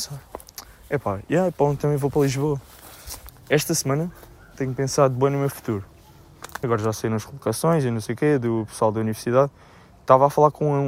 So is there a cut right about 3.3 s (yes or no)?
yes